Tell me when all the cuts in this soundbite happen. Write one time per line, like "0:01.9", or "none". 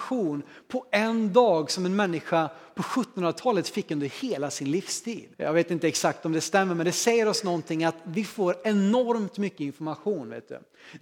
0:05.3